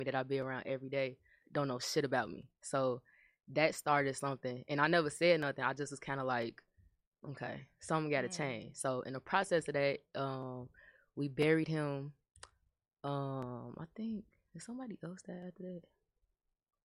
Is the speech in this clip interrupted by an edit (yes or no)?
no